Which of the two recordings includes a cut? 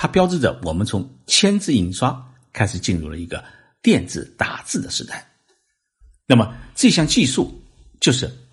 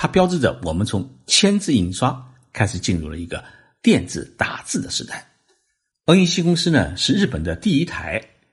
second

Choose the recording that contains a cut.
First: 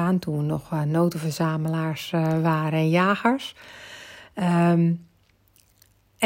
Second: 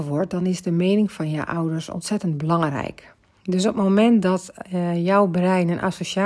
second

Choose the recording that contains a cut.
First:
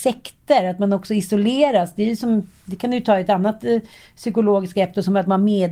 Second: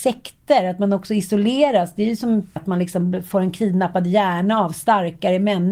second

